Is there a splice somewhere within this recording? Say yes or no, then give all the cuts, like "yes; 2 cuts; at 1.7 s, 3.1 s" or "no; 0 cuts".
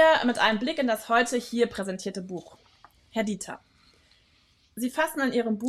no; 0 cuts